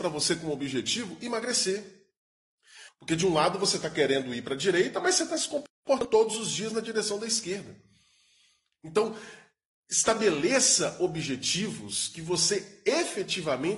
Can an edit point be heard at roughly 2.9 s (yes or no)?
yes